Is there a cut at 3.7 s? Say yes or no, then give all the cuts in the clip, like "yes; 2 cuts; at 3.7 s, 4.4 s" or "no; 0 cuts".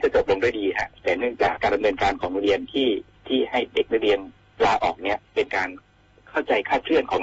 no; 2 cuts; at 1.6 s, 5.2 s